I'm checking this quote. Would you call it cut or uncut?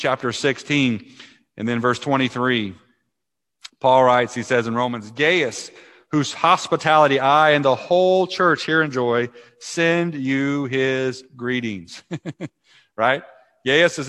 uncut